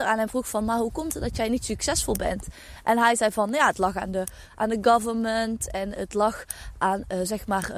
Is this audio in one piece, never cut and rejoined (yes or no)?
yes